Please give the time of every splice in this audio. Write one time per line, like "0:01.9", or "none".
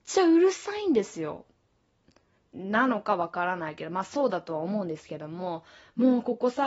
0:02.4